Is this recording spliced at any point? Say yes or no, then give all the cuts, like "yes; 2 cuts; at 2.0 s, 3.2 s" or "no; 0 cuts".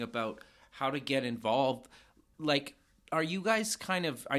no; 0 cuts